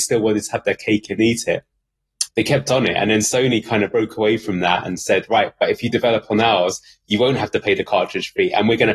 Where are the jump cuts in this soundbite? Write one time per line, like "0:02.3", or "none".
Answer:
0:02.3